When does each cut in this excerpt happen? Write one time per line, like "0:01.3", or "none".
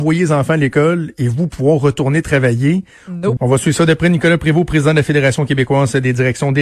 0:03.4